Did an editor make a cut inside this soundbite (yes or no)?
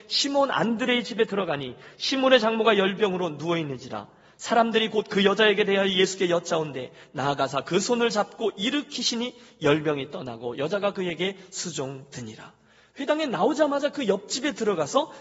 no